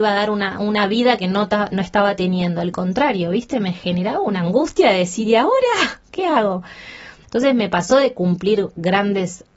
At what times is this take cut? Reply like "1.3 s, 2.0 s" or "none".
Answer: 7.2 s